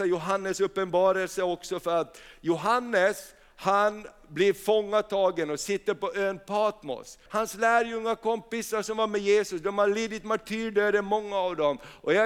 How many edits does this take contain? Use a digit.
1